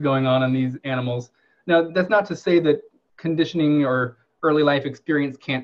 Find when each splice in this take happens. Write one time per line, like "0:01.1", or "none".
none